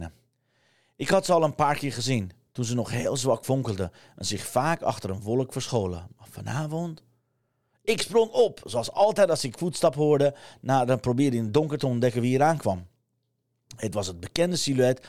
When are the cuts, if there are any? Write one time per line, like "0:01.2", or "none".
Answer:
none